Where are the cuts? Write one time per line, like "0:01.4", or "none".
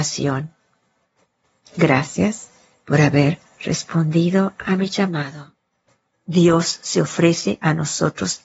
0:06.1